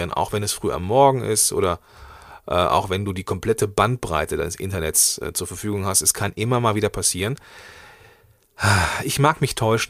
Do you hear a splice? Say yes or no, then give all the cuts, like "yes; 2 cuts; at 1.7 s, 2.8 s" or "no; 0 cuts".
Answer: no; 0 cuts